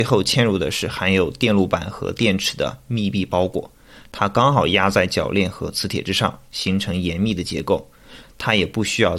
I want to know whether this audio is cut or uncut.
cut